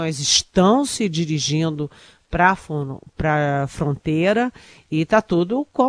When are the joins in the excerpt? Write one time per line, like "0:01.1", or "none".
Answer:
none